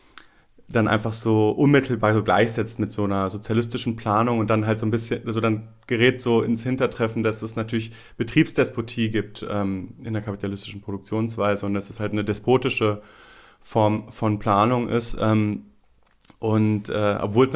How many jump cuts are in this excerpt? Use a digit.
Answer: 0